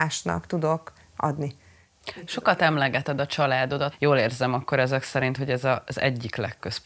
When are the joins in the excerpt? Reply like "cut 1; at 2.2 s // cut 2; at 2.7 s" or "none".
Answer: none